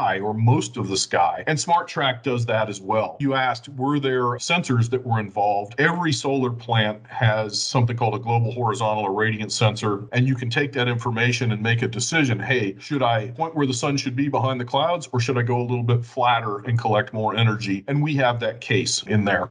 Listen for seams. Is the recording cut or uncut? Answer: cut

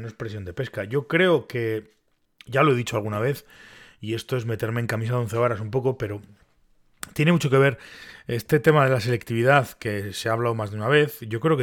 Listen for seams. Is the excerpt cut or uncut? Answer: uncut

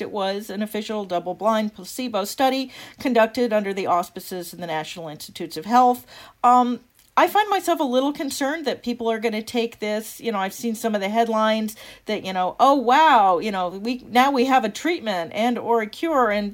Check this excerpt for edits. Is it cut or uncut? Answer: uncut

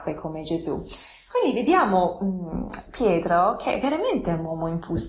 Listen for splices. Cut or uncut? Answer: uncut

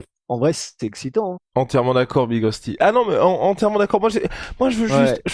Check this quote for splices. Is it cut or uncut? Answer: cut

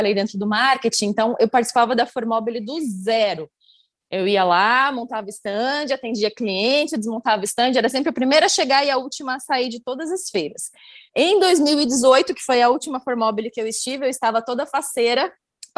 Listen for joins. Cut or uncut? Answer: cut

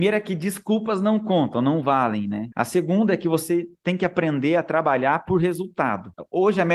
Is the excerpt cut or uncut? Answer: uncut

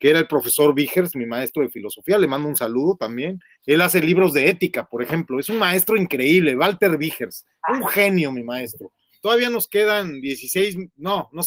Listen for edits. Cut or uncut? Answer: cut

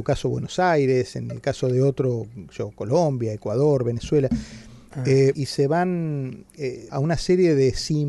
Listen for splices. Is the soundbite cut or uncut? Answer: cut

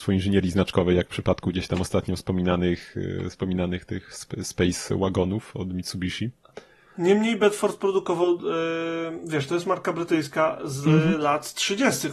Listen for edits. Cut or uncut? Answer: uncut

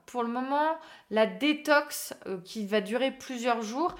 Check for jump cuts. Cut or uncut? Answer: uncut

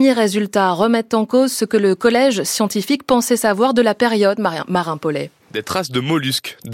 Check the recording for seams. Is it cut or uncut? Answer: cut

